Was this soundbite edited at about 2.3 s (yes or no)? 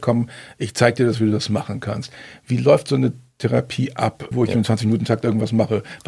no